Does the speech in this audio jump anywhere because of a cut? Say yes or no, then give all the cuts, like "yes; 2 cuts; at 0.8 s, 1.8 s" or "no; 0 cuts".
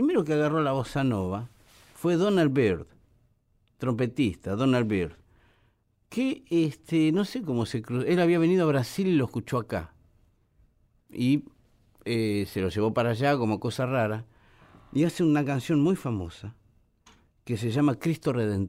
no; 0 cuts